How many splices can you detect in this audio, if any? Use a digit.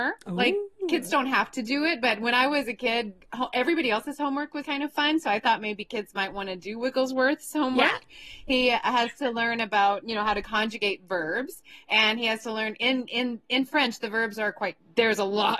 1